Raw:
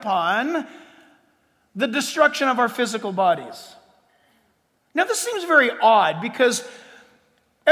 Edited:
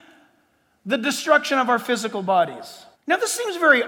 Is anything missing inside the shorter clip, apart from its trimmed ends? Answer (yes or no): yes